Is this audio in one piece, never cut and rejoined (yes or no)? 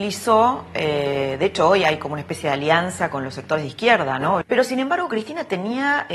no